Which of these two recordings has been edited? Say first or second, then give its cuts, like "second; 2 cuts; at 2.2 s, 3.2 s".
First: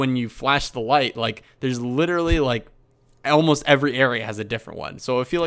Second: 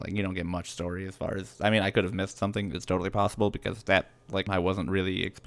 second; 1 cut; at 4.5 s